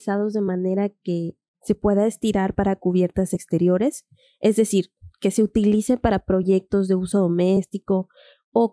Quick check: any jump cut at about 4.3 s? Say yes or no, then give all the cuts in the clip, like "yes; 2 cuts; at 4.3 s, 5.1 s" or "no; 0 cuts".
no; 0 cuts